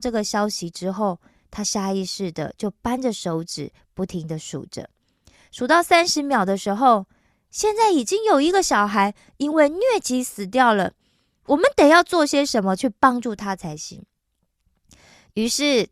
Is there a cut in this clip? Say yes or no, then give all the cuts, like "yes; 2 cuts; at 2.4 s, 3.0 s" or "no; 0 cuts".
yes; 1 cut; at 7.3 s